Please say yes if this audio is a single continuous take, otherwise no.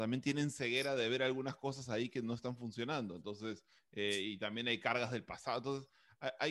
yes